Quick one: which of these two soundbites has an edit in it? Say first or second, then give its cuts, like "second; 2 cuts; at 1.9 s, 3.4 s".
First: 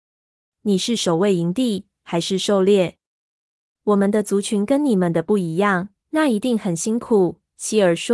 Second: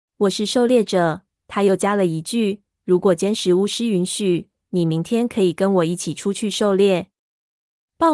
first; 1 cut; at 6.0 s